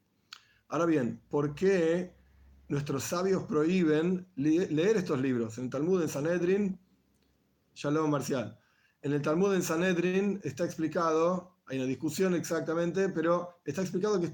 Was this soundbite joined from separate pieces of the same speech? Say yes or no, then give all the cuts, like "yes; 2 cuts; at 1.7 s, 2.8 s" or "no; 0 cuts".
no; 0 cuts